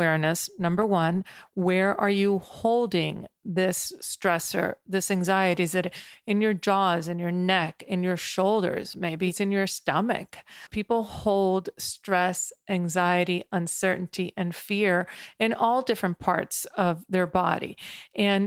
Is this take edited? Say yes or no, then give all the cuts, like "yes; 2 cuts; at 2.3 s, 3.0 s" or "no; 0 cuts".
no; 0 cuts